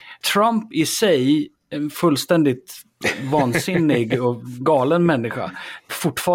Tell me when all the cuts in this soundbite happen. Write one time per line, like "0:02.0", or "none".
none